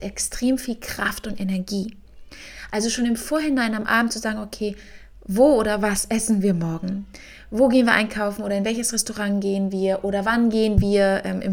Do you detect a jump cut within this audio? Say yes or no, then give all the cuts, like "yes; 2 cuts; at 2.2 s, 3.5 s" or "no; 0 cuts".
no; 0 cuts